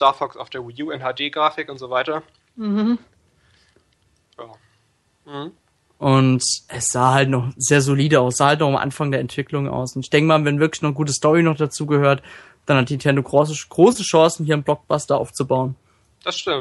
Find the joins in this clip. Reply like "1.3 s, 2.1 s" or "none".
5.0 s

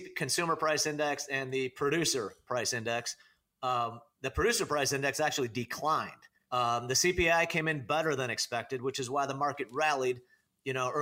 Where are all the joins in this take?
6.4 s

